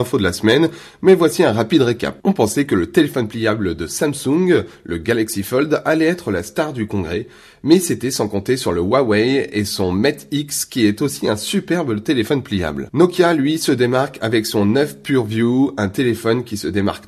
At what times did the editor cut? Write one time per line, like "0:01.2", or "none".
none